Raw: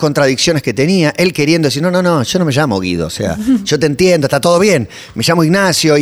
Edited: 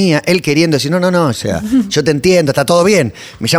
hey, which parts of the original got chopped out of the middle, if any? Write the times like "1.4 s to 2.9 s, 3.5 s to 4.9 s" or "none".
2.2 s to 3.1 s